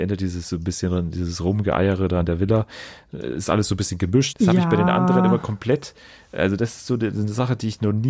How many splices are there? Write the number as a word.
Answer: one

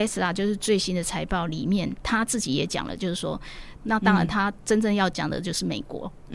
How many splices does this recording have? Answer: one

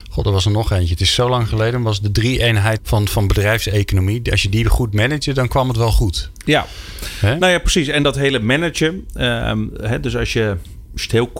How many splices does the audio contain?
one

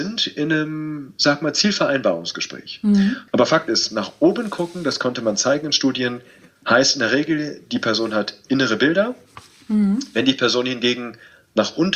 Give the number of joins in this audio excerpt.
one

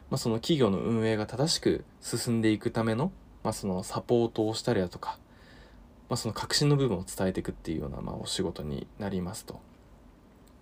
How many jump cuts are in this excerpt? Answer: zero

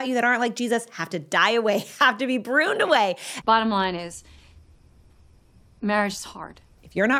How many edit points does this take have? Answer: one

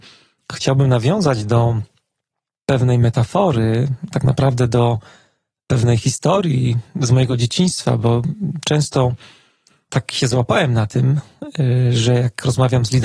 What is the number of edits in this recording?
zero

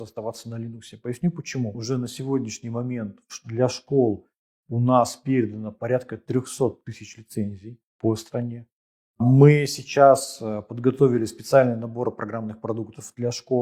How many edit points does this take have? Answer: two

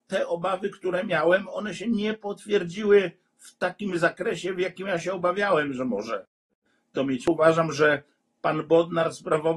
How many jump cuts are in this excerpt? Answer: zero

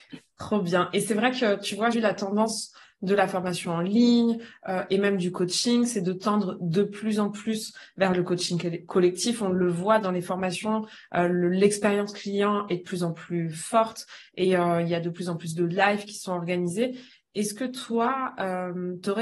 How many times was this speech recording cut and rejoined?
one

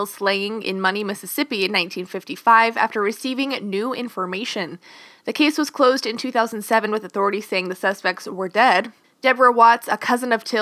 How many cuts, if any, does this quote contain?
one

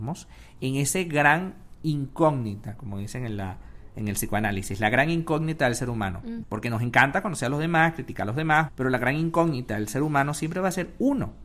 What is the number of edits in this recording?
two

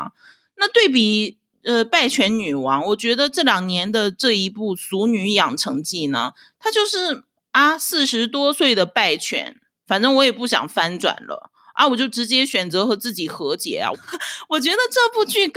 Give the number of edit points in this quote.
one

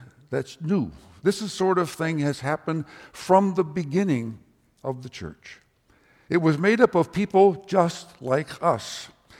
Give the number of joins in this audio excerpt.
two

